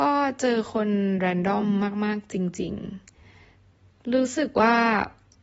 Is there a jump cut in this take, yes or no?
no